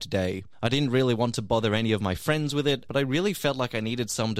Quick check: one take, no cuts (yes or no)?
no